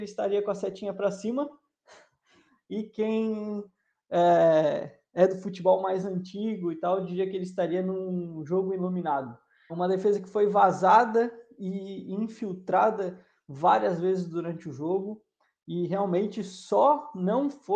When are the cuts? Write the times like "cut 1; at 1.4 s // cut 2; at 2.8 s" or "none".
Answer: cut 1; at 9.7 s